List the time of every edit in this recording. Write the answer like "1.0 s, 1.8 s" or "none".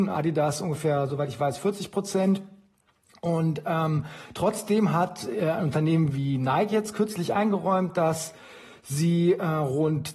none